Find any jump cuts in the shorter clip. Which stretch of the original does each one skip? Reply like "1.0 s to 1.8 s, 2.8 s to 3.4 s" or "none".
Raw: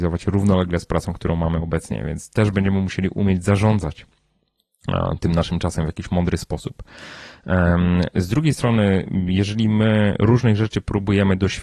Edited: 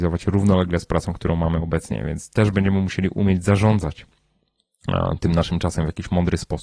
none